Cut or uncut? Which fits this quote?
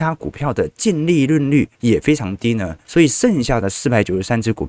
cut